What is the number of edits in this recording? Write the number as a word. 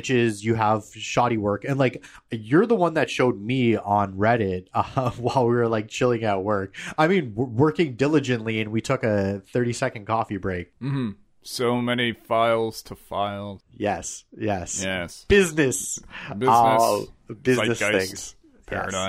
zero